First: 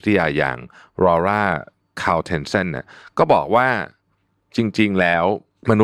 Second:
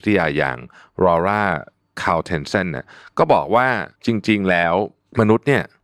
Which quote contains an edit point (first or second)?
second